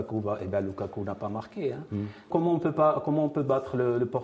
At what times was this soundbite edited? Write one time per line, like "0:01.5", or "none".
0:02.3